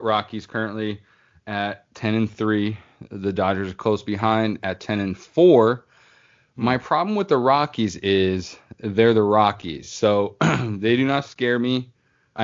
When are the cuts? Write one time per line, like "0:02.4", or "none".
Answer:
none